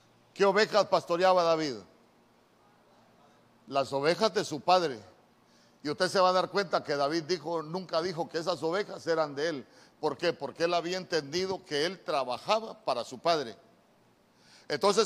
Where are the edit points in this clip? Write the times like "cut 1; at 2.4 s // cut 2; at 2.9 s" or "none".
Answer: none